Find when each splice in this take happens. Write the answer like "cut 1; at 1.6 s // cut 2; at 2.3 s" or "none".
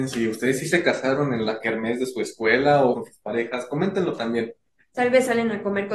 cut 1; at 2.9 s